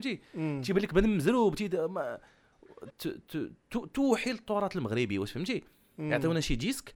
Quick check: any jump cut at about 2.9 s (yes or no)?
yes